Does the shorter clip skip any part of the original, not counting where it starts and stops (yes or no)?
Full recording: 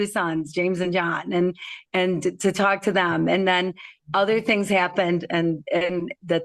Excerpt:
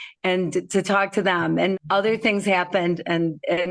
yes